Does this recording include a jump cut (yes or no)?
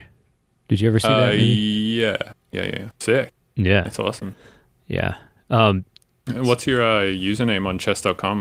yes